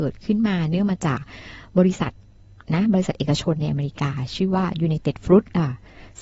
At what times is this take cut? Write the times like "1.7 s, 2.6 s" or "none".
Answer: none